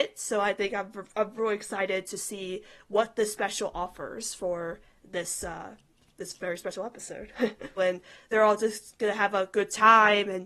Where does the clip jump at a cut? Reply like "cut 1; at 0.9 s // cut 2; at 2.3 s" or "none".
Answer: cut 1; at 7.8 s

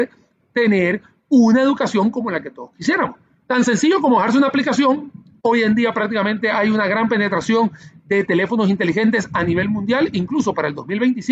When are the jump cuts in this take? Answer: none

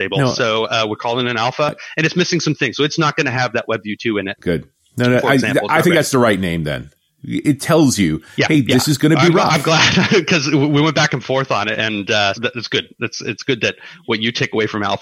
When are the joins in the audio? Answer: cut 1; at 12.3 s

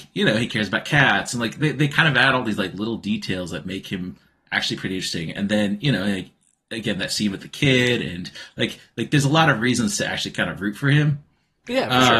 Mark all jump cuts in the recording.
none

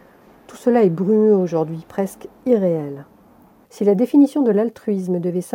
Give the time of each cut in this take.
cut 1; at 3.6 s

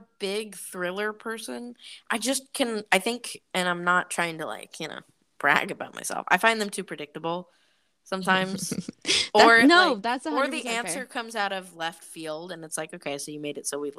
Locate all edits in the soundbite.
none

